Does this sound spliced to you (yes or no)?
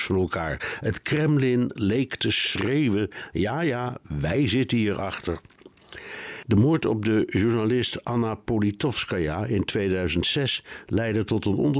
no